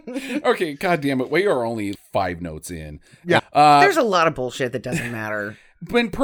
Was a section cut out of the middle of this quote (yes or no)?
yes